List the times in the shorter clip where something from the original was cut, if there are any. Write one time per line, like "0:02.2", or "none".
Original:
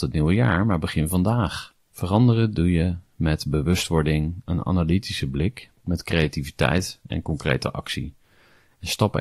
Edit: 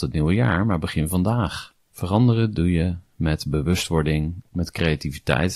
0:04.4